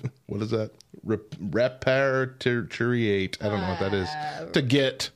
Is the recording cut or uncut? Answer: uncut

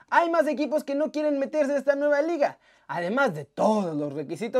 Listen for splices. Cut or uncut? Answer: uncut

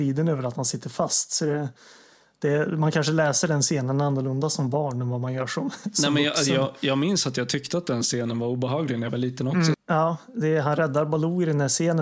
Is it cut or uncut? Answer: cut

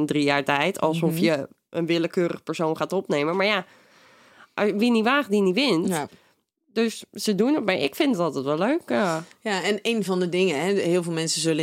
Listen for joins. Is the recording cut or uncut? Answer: uncut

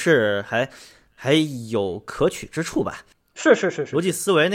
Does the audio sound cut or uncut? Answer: uncut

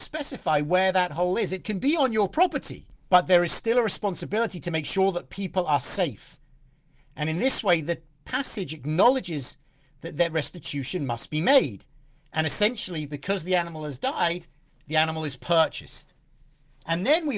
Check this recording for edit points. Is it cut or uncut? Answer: uncut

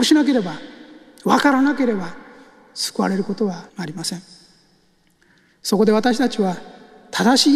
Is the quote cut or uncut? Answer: cut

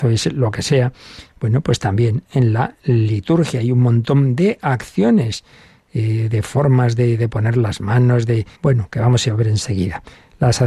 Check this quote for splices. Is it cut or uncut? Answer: cut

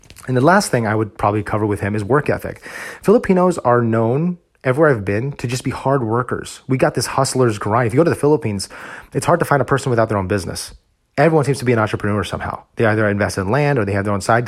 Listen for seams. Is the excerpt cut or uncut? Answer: uncut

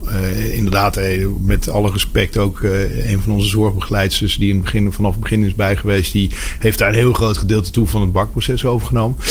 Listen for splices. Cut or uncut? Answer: uncut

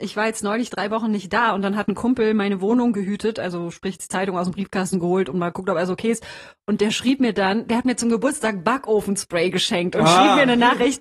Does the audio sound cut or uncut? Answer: uncut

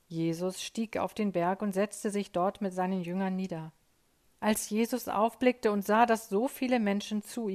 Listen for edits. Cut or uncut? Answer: cut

